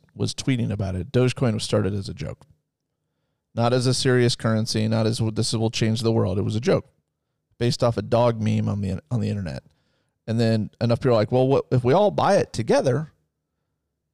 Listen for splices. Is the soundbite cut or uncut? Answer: uncut